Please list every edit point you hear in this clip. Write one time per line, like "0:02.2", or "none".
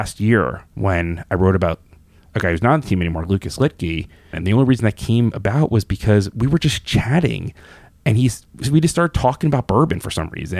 0:04.3